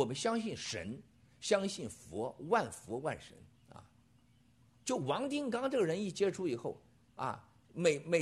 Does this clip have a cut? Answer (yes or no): yes